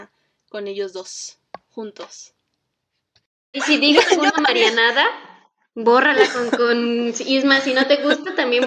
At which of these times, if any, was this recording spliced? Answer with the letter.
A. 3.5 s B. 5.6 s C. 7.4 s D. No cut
A